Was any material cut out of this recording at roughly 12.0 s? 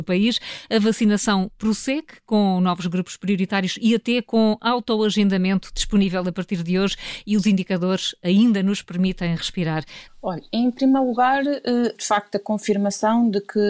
yes; 2 cuts; at 10.1 s, 12.0 s

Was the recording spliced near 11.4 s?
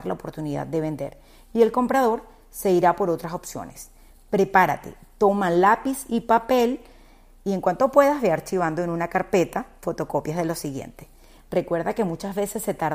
yes; 1 cut; at 11.4 s

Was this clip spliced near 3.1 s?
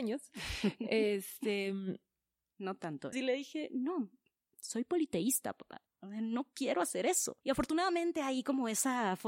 yes; 2 cuts; at 3.1 s, 5.9 s

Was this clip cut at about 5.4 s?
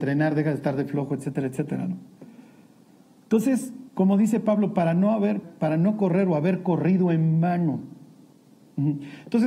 yes; 1 cut; at 5.4 s

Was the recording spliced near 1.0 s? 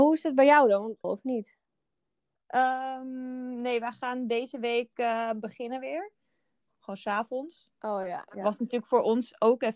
yes; 2 cuts; at 1.0 s, 6.7 s

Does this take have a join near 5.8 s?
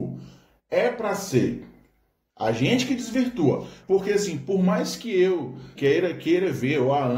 yes; 2 cuts; at 3.8 s, 5.8 s

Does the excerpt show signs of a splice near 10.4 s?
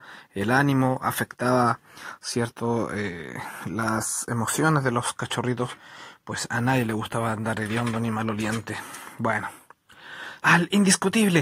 yes; 1 cut; at 10.4 s

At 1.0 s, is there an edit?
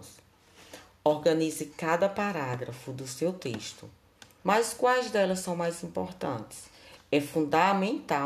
no; 2 cuts; at 4.4 s, 7.0 s

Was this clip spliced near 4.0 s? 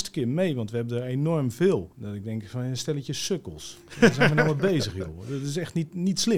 no; 1 cut; at 1.9 s

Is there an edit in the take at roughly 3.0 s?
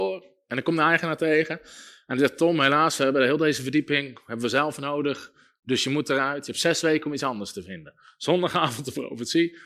no; 0 cuts

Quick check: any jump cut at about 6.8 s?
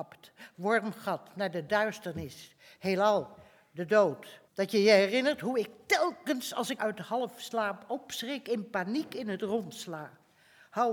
yes; 2 cuts; at 4.5 s, 6.8 s

